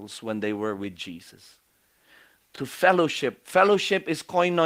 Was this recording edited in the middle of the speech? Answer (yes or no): no